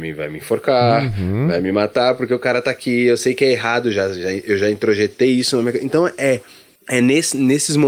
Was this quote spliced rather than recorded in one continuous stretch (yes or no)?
no